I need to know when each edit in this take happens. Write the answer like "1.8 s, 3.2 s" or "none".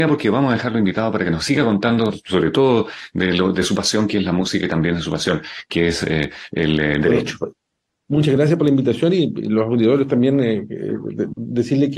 none